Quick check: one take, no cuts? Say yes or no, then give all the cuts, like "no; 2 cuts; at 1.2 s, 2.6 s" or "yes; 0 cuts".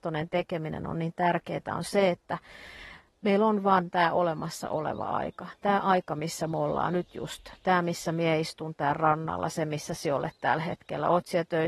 yes; 0 cuts